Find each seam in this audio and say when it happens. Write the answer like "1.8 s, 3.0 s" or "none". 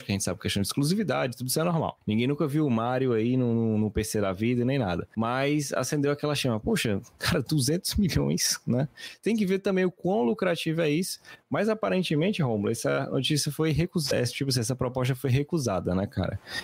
none